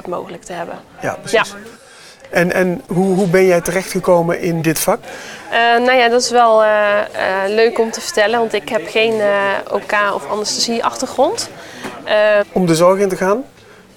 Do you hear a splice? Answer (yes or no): yes